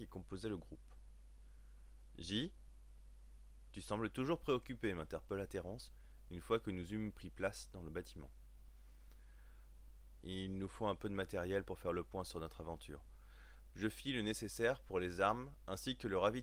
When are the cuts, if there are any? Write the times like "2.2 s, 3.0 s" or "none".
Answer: 10.2 s, 13.7 s